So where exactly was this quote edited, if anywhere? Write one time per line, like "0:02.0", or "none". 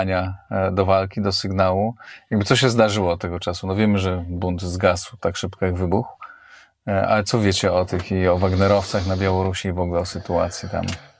none